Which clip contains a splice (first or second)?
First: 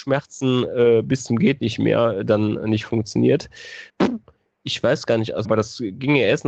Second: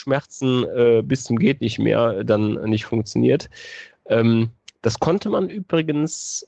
first